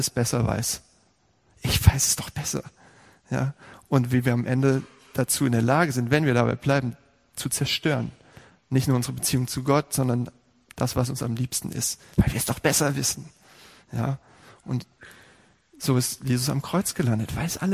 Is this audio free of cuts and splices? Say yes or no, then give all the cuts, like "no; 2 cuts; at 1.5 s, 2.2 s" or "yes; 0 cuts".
yes; 0 cuts